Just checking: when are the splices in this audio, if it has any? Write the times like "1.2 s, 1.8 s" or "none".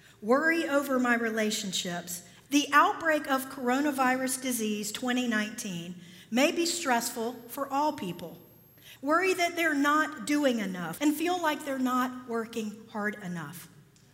2.5 s, 9.0 s, 11.0 s

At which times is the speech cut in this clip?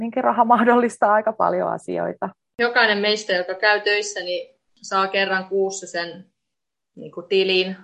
none

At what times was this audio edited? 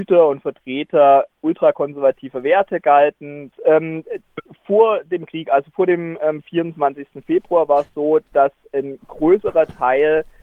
3.5 s

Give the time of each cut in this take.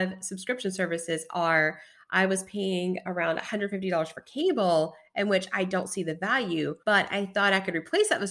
6.8 s

